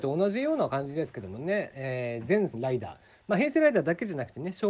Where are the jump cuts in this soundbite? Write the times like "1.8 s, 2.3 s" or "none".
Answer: 2.5 s

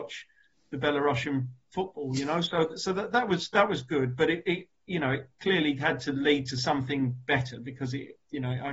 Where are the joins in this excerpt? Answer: none

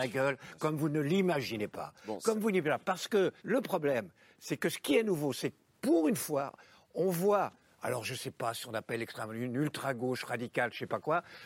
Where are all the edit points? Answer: 3.4 s

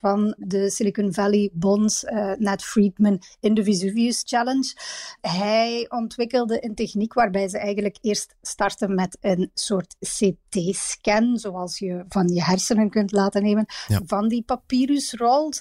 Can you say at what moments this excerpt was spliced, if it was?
none

